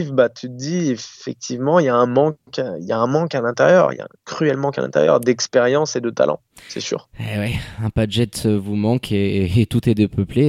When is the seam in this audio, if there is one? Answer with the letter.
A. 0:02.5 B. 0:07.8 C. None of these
C